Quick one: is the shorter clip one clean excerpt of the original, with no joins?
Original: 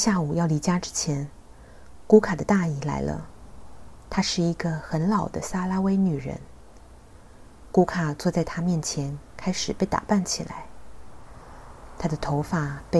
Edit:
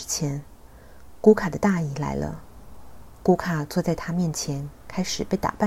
no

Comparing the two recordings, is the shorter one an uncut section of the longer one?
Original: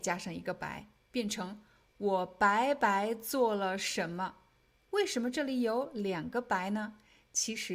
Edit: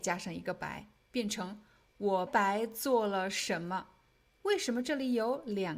no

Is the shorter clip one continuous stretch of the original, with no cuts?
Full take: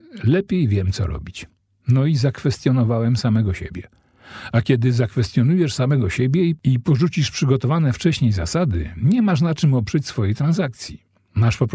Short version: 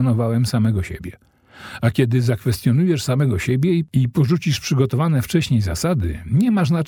yes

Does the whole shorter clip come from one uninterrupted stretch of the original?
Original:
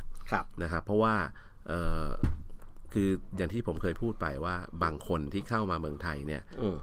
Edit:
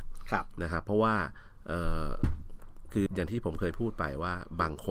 no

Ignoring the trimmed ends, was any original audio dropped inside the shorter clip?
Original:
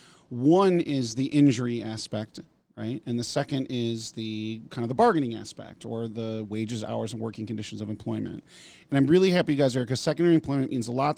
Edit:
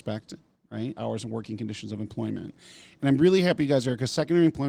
yes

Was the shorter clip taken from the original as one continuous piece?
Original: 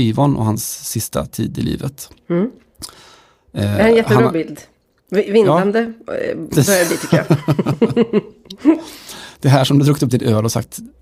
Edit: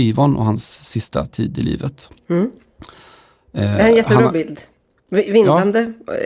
yes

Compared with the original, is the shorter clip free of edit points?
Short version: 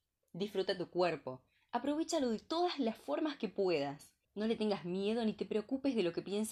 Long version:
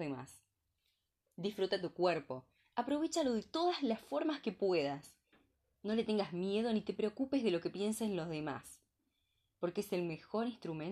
no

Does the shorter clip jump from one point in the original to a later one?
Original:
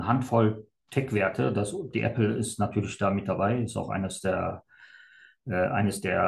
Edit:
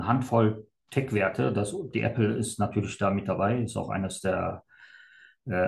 no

